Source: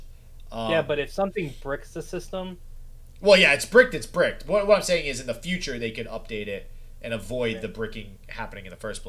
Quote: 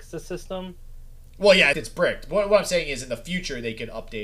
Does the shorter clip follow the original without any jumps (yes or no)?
no